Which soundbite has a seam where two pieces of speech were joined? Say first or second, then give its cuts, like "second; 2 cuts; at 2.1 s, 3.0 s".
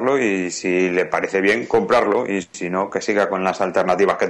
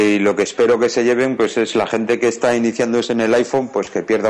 first; 1 cut; at 2.9 s